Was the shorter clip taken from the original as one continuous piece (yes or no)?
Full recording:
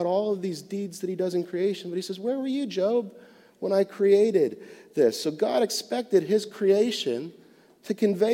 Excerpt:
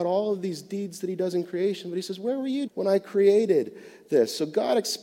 no